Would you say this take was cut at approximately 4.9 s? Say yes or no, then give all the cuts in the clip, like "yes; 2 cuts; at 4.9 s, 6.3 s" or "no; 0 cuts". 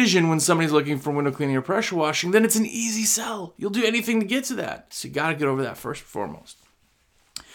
yes; 1 cut; at 4.9 s